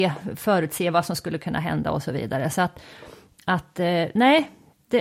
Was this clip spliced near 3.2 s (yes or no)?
no